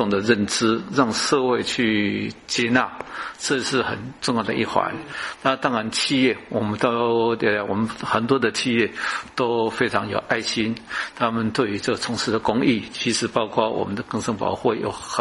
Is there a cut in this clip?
no; 0 cuts

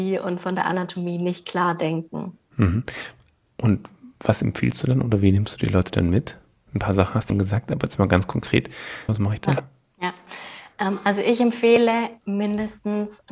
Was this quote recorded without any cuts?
no; 3 cuts; at 2.5 s, 7.3 s, 9.1 s

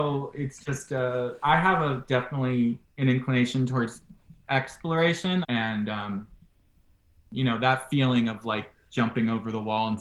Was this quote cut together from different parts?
yes; 1 cut; at 5.4 s

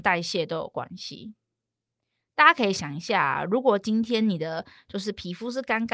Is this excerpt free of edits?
yes; 0 cuts

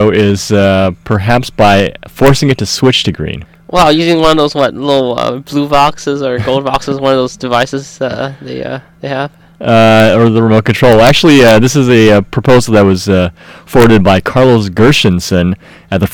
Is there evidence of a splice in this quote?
no; 0 cuts

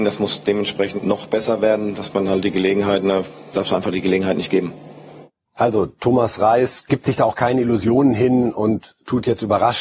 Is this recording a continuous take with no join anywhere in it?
no; 2 cuts; at 1.0 s, 3.5 s

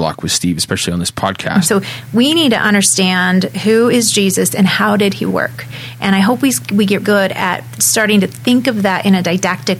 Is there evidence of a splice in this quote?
yes; 2 cuts; at 1.6 s, 7.0 s

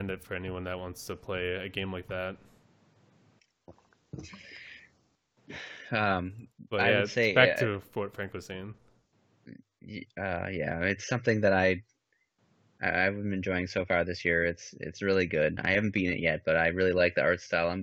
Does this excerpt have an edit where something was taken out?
no; 0 cuts

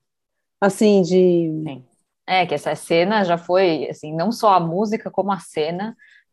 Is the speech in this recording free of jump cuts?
yes; 0 cuts

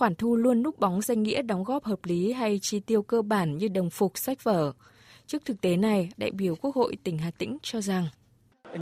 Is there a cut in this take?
yes; 1 cut; at 6.1 s

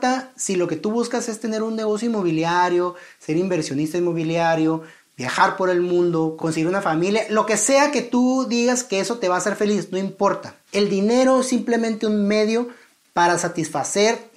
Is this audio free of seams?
no; 2 cuts; at 6.4 s, 10.7 s

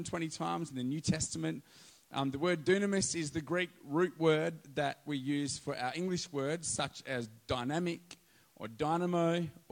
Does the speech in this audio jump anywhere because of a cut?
no; 0 cuts

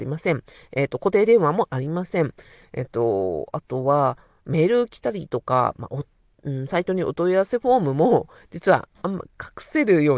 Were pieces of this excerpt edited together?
no; 0 cuts

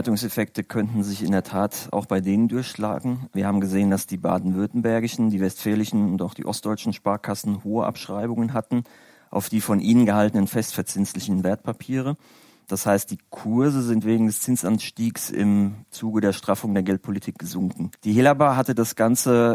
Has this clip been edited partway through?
yes; 1 cut; at 17.9 s

